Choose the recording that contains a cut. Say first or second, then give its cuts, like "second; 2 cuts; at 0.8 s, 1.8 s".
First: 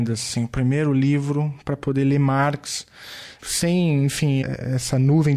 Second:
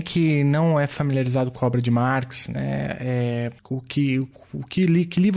first; 2 cuts; at 3.4 s, 4.4 s